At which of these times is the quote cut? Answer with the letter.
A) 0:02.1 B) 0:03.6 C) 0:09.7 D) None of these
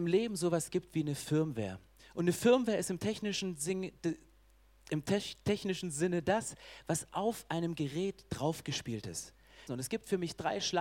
C